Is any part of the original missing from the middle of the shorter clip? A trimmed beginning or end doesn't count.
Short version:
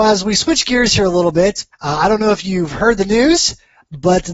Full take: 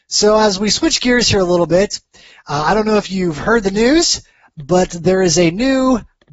yes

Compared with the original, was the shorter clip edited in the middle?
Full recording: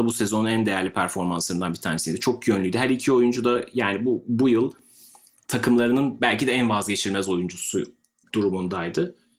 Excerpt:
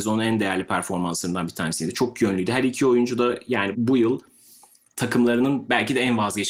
yes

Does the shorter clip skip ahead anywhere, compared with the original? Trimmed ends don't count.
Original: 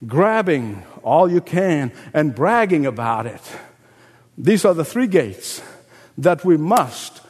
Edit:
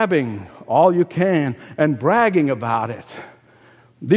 no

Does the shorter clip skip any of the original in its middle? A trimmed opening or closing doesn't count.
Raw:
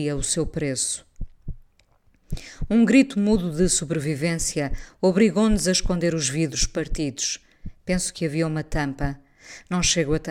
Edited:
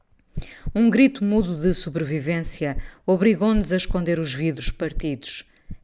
no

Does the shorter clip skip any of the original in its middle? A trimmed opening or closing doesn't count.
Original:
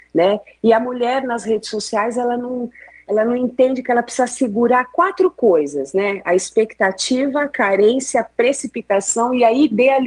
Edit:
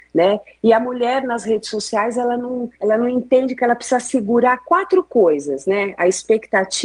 yes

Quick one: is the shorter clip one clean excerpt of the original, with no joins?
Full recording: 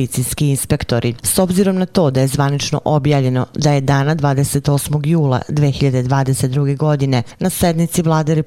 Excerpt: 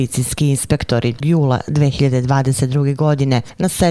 no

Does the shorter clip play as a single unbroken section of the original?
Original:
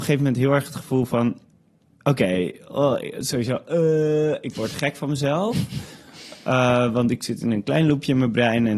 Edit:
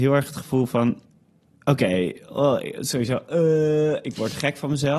yes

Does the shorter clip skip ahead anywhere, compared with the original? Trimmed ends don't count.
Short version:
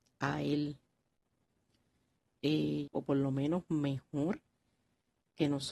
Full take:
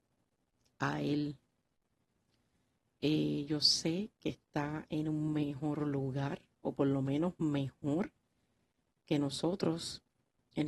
yes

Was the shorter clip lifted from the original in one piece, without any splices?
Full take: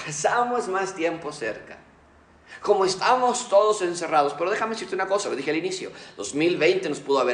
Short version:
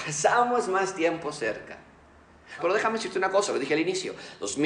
no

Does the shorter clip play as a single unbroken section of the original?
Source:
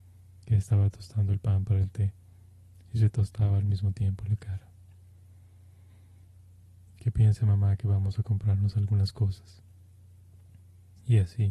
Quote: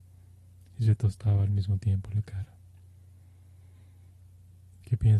yes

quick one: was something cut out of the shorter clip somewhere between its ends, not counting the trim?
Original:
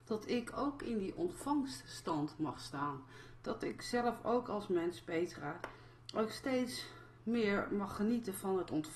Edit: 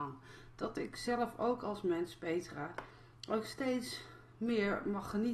no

